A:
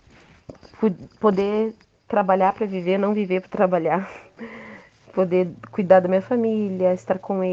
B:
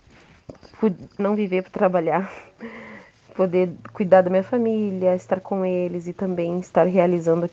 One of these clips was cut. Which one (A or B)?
B